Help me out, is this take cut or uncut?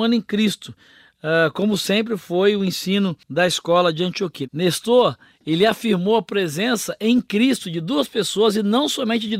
cut